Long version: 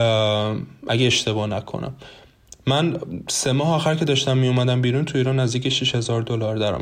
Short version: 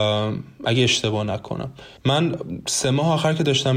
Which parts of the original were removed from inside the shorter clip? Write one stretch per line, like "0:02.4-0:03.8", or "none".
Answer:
0:02.2-0:02.6

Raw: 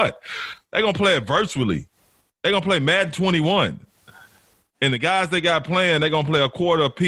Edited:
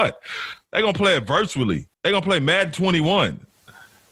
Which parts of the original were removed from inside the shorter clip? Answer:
0:01.9-0:02.3

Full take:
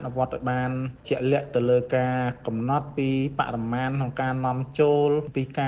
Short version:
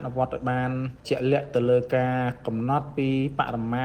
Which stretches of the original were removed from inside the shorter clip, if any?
none

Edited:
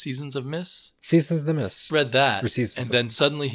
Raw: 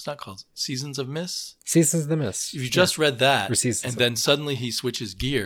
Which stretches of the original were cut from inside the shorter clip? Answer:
0:02.5-0:03.0

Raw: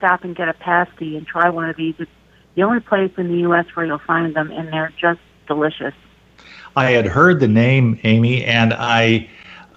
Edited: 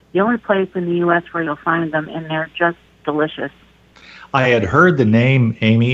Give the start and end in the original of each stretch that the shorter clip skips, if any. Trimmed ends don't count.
none

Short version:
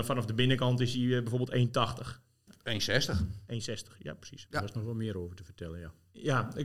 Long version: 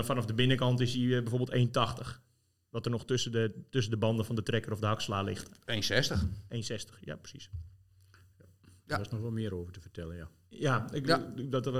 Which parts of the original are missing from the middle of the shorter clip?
0:02.5-0:05.5
0:07.5-0:08.8

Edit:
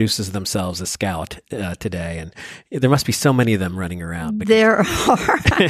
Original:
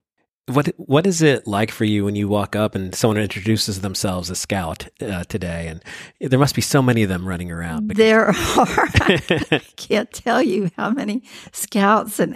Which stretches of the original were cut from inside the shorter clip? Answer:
none

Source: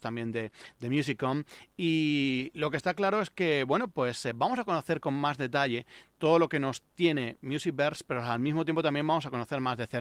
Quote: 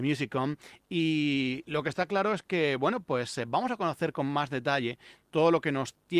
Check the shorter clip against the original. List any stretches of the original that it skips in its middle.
none

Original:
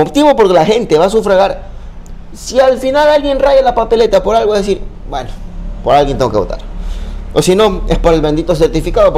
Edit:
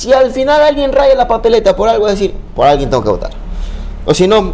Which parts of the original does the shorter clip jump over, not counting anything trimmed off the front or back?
0:05.0-0:05.8

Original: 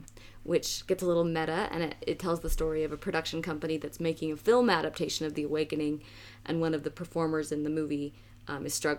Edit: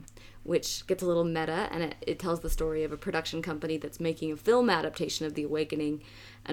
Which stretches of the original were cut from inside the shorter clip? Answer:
none

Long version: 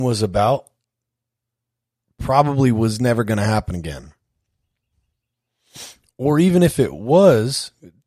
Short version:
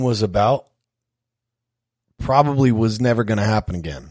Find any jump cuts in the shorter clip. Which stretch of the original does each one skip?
none

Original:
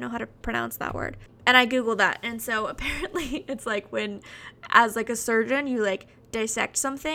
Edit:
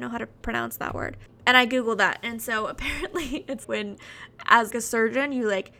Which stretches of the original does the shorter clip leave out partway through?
0:03.6-0:03.9
0:04.9-0:05.0

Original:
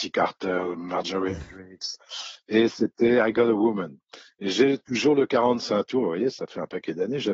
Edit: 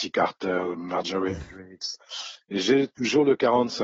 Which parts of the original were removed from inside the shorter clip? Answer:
0:02.4-0:04.3

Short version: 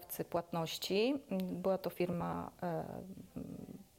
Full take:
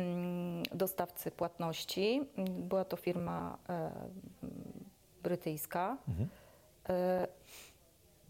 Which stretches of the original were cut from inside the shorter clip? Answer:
none

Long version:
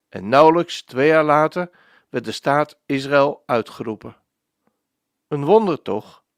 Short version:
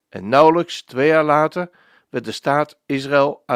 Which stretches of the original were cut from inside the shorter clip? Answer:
none

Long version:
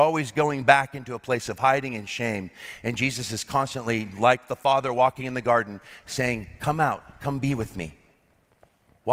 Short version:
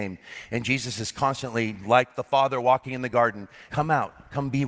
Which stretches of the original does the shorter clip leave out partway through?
0:06.0-0:06.6

